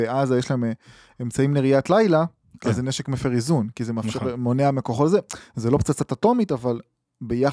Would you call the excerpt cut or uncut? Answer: uncut